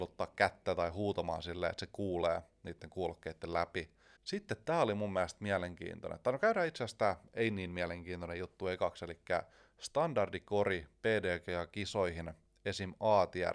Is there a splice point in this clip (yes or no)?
no